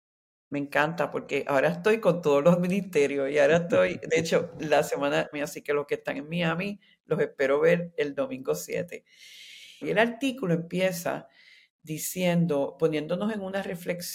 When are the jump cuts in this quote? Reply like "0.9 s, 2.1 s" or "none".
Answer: 5.3 s, 9.8 s